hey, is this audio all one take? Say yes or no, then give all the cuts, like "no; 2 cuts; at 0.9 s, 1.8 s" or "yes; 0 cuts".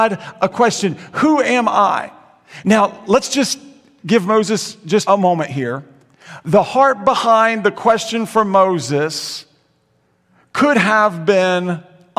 no; 1 cut; at 5.1 s